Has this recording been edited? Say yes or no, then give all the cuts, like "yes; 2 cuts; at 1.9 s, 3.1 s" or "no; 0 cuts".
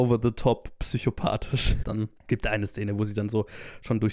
yes; 1 cut; at 1.8 s